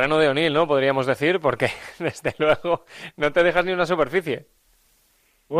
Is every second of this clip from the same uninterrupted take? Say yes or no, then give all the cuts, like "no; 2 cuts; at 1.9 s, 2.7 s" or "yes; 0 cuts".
yes; 0 cuts